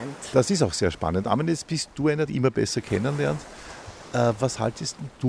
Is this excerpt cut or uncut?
cut